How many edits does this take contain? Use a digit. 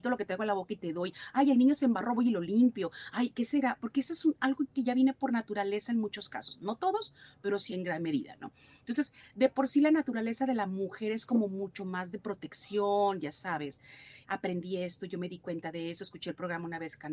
2